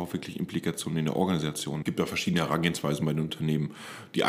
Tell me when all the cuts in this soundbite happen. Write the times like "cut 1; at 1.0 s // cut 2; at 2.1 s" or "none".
cut 1; at 1.8 s